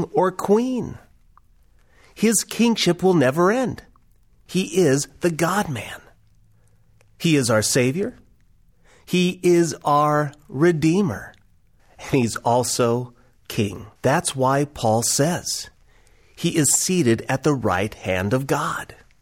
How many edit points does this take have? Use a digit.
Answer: 3